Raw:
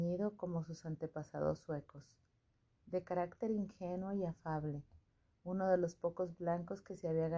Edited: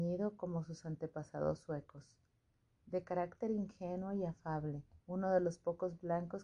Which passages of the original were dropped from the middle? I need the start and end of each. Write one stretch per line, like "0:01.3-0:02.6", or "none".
0:05.0-0:05.4